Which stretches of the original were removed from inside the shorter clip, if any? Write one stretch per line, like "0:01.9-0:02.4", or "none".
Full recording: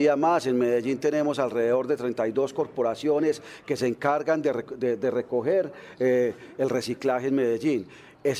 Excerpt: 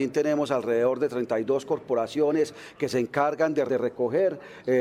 0:04.5-0:05.0